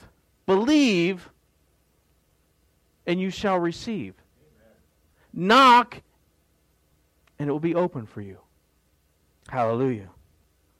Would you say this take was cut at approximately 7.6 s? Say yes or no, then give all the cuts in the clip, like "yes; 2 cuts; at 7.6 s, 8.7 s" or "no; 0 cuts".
no; 3 cuts; at 3.0 s, 5.1 s, 9.4 s